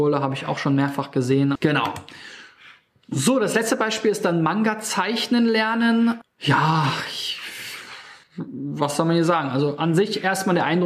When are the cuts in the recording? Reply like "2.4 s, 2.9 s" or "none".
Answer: 1.6 s, 6.2 s, 8.2 s